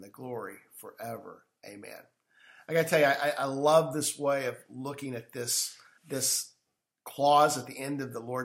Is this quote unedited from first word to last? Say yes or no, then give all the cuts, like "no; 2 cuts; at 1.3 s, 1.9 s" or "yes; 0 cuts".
no; 1 cut; at 6.0 s